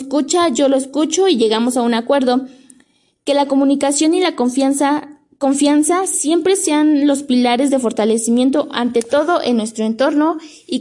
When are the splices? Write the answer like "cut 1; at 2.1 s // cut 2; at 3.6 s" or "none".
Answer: none